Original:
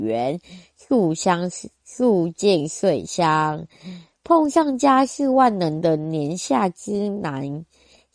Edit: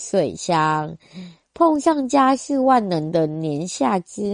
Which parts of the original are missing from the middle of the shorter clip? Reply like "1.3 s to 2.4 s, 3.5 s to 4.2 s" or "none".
none